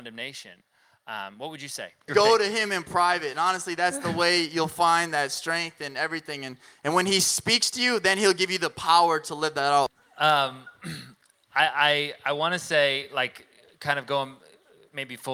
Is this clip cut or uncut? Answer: cut